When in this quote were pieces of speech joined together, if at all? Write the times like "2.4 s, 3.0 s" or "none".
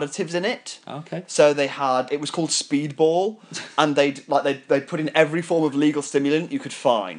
2.1 s